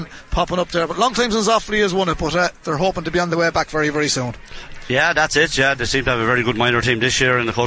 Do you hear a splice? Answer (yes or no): no